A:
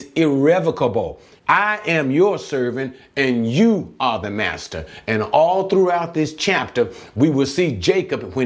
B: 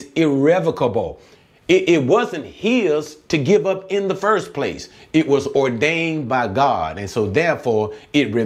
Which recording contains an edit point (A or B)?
A